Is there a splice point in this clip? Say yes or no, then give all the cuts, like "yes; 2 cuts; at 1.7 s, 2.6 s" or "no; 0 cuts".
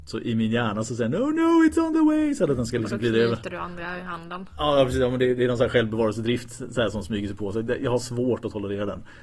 no; 0 cuts